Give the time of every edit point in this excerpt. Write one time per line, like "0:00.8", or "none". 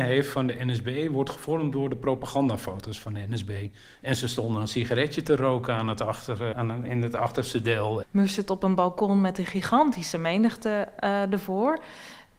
0:03.9
0:06.5
0:08.0